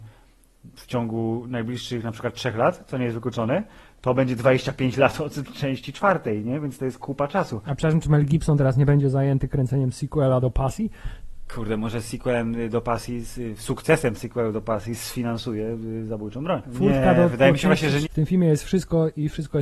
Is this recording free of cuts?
no; 3 cuts; at 14.1 s, 16.6 s, 18.0 s

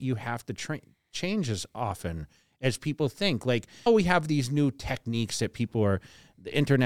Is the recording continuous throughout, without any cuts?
no; 1 cut; at 3.9 s

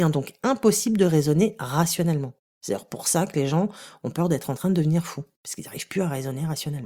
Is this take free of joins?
yes; 0 cuts

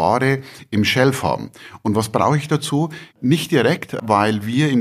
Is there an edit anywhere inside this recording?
yes; 1 cut; at 3.1 s

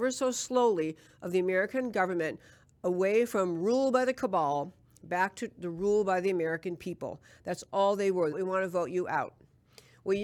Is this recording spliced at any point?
yes; 1 cut; at 8.3 s

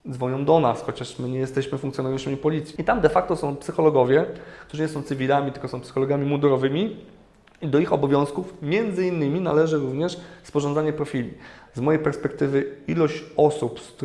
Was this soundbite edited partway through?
yes; 2 cuts; at 2.8 s, 11.7 s

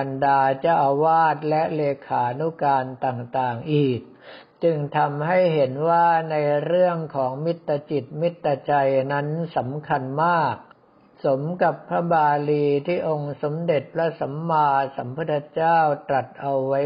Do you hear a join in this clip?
no; 0 cuts

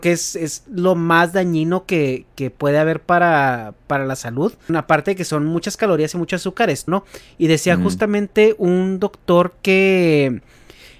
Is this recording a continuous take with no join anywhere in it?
no; 2 cuts; at 4.7 s, 6.9 s

